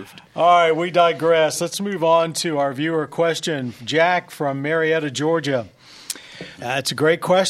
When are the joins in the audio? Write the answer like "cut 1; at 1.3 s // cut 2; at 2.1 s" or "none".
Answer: cut 1; at 6.6 s